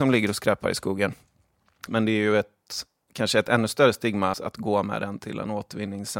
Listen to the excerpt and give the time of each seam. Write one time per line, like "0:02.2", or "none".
0:01.9
0:04.3